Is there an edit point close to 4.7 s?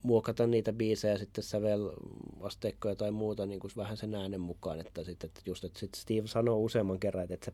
no; 0 cuts

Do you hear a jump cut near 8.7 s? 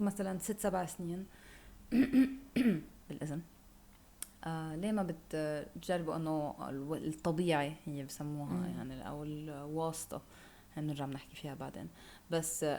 no; 0 cuts

